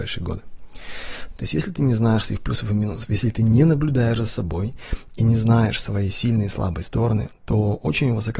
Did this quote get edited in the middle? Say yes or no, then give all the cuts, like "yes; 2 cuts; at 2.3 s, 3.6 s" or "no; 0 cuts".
yes; 1 cut; at 1.3 s